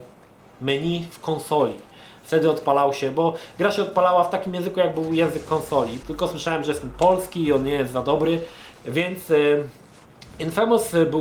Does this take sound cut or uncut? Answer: cut